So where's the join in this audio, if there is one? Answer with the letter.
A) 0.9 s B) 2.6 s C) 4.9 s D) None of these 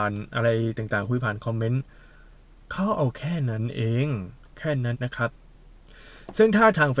C